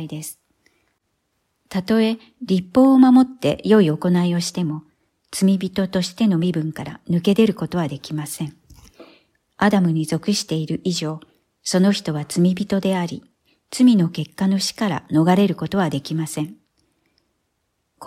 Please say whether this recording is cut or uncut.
uncut